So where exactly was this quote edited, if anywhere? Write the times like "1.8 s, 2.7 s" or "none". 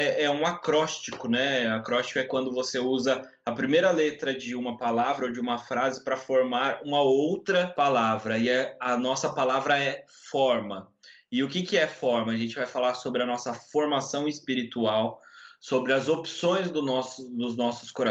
none